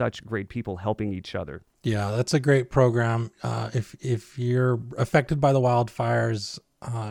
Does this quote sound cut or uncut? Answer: uncut